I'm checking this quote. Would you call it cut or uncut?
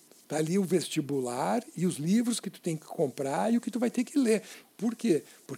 cut